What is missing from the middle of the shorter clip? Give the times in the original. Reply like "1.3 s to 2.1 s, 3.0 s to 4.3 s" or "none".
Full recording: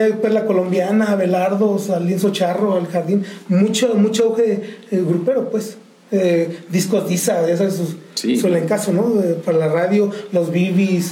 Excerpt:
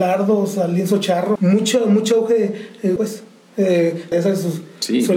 2.7 s to 3.4 s, 5.0 s to 5.5 s, 6.7 s to 7.5 s

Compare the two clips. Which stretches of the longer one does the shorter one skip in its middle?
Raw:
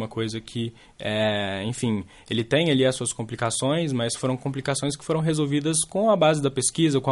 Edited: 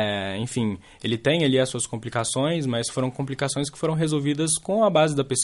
none

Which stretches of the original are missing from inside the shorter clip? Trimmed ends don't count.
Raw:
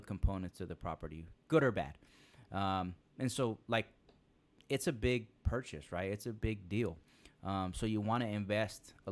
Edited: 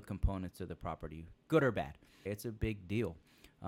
2.3 s to 6.1 s

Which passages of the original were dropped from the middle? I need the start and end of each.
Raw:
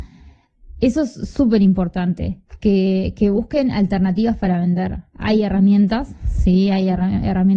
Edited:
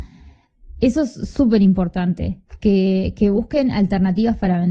none

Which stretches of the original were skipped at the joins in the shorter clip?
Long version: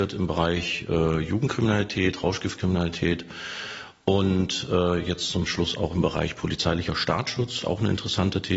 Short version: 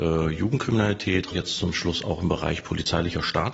2.2 s to 5.0 s

